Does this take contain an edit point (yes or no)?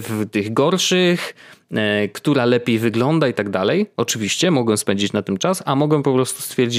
no